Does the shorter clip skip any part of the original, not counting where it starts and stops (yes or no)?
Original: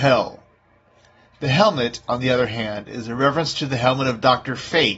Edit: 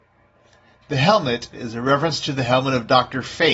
yes